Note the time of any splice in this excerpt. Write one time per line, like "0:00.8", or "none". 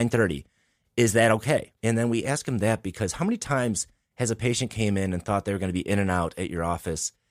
0:01.7